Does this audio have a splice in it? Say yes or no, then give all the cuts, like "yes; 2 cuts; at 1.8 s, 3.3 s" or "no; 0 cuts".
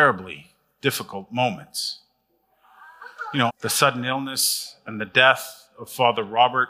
yes; 1 cut; at 3.5 s